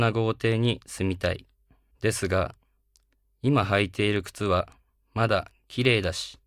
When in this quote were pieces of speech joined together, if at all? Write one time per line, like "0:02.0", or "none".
0:01.9